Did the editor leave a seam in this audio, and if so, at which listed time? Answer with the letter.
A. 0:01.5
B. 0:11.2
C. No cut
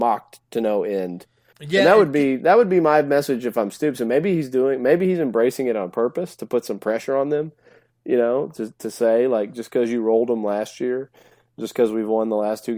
A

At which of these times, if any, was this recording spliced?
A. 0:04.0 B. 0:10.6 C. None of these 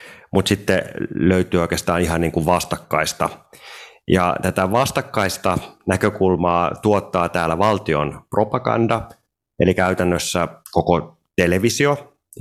B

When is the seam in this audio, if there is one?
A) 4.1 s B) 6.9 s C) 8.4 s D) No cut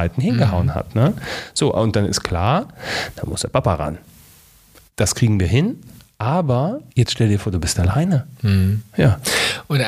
B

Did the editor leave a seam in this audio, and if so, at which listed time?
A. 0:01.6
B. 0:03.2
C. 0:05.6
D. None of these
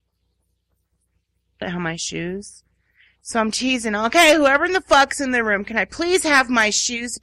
A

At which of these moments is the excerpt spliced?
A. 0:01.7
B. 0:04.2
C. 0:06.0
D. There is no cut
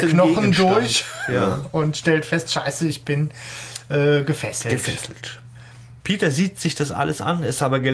C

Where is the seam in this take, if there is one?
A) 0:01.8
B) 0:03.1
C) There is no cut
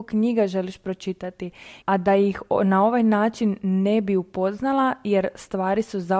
A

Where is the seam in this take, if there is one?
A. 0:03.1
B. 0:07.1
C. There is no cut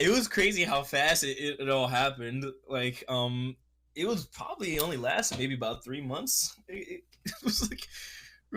B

